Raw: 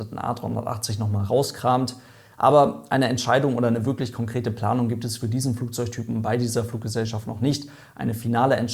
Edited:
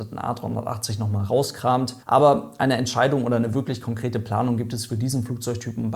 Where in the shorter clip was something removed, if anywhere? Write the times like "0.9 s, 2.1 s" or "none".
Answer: 2.0 s